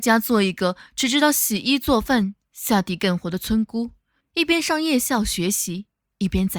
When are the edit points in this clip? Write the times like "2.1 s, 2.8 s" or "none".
4.2 s